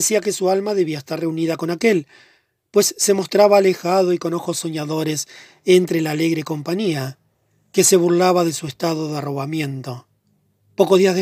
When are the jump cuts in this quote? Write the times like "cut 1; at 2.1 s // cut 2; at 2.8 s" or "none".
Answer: none